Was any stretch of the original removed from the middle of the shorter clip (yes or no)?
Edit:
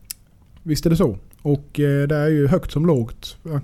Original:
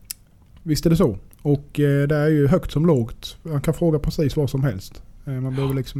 no